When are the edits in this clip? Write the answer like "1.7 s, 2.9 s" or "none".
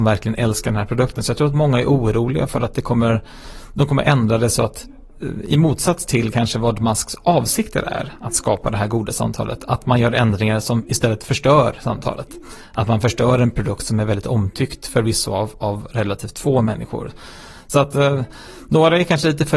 none